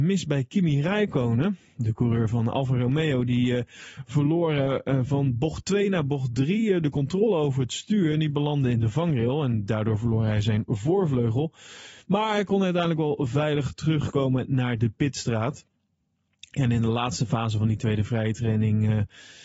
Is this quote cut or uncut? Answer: uncut